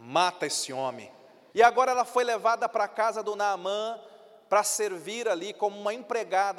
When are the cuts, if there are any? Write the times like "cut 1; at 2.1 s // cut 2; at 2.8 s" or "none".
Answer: cut 1; at 1.5 s